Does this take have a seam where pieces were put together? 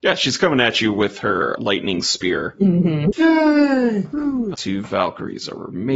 yes; 2 cuts; at 3.1 s, 4.5 s

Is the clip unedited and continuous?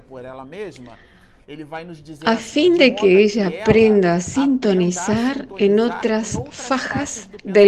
yes; 0 cuts

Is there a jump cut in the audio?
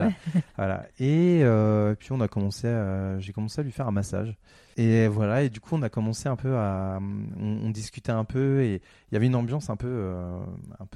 yes; 1 cut; at 4.7 s

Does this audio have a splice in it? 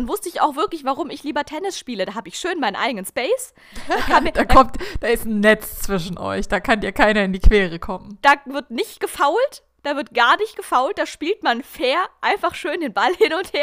no; 0 cuts

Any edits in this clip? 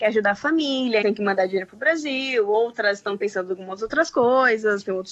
yes; 1 cut; at 1.0 s

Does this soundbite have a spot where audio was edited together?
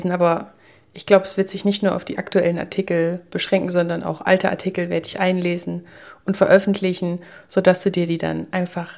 no; 0 cuts

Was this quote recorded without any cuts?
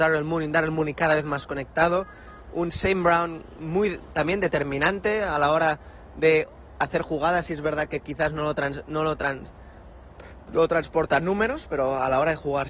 yes; 0 cuts

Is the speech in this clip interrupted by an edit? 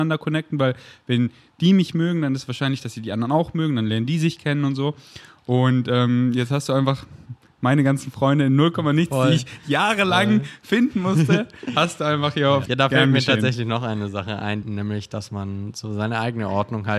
yes; 2 cuts; at 12.7 s, 14.6 s

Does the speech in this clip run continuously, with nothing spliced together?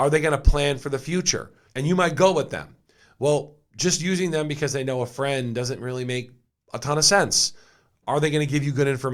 no; 1 cut; at 1.7 s

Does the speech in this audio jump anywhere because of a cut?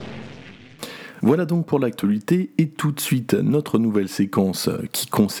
no; 0 cuts

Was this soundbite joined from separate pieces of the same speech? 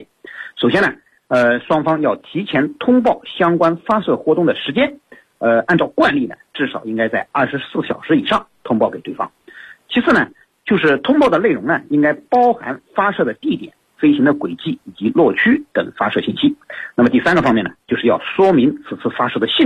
yes; 1 cut; at 13.9 s

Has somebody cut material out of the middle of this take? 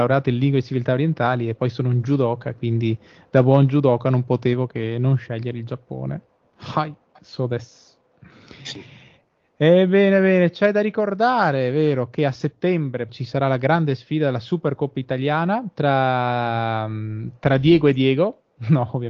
yes; 1 cut; at 13.1 s

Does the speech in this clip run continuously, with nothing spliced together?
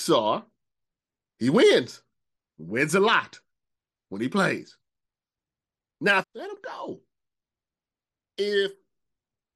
no; 1 cut; at 6.2 s

